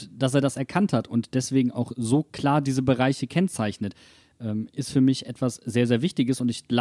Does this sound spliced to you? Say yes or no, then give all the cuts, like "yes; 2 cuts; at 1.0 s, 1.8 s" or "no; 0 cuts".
no; 0 cuts